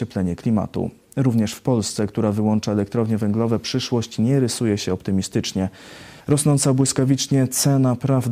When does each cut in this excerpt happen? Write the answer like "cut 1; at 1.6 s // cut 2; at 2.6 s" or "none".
cut 1; at 6.2 s